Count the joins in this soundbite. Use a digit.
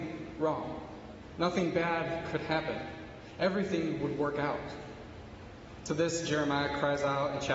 0